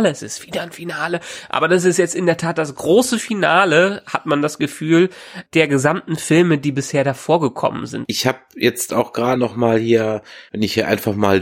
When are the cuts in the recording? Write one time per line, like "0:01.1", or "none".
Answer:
0:08.0
0:09.4